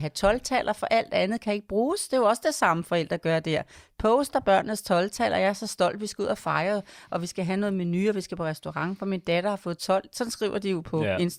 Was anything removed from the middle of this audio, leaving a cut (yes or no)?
no